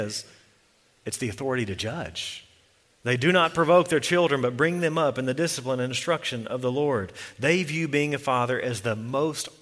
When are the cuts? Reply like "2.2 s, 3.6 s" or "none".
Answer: 2.8 s